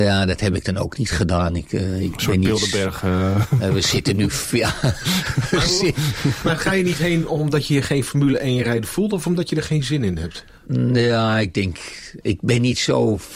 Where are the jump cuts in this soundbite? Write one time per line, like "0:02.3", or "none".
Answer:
none

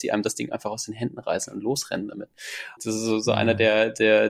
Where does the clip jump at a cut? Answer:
0:02.8

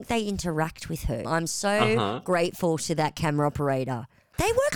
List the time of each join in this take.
0:01.2

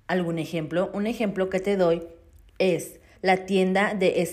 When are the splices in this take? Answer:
0:03.2

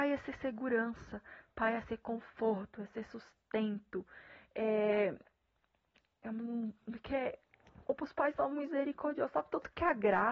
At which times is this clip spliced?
none

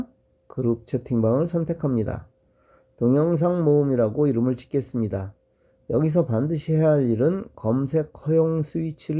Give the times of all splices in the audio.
none

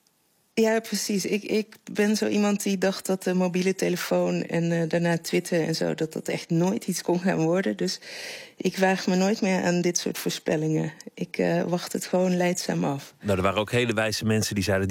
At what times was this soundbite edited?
none

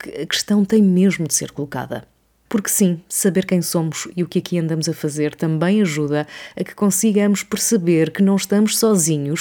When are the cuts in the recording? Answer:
0:02.4

